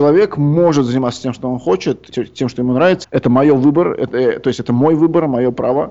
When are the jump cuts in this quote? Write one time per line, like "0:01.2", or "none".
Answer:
0:03.0